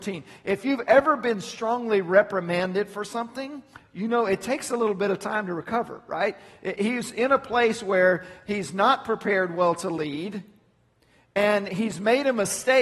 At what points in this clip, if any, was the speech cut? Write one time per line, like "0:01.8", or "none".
0:06.8